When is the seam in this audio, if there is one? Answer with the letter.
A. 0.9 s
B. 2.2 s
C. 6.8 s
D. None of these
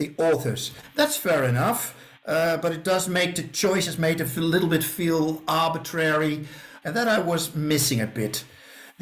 C